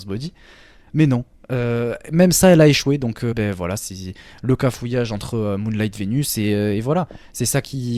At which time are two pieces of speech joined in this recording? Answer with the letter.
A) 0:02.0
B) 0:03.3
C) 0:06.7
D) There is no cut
B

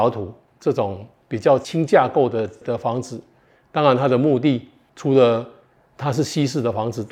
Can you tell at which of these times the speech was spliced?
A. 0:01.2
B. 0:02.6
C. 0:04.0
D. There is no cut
B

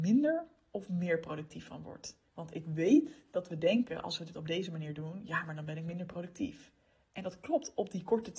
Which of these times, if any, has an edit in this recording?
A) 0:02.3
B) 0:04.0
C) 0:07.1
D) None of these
A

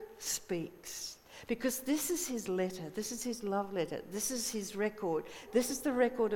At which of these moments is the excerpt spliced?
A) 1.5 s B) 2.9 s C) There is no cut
C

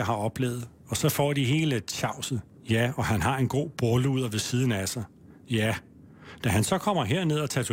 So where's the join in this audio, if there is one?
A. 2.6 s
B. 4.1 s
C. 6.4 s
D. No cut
A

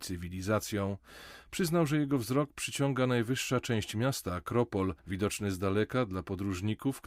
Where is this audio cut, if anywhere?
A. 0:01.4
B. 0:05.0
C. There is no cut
B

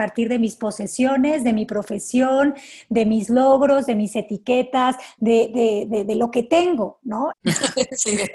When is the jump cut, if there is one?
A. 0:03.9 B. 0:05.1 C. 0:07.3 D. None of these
C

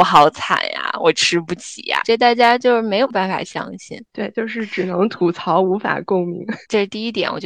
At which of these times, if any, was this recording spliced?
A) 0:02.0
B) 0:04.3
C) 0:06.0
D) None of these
A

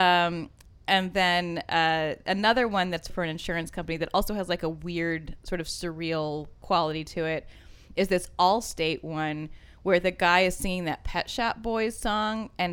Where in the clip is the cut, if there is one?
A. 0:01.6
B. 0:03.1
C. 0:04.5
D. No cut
B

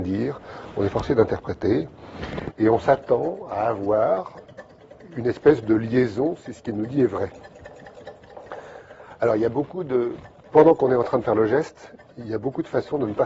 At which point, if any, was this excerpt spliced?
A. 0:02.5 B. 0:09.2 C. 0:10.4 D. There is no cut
A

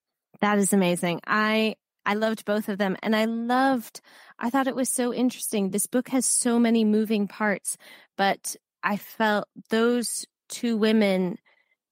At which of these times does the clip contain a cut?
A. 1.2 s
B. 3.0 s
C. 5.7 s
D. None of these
D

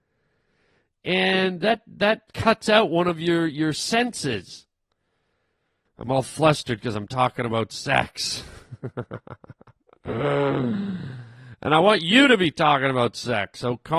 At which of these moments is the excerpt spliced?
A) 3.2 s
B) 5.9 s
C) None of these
B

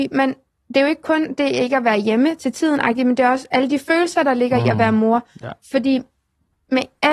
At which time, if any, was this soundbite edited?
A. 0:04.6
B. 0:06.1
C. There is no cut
C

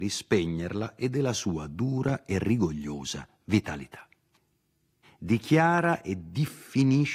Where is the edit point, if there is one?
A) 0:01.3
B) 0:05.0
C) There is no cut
B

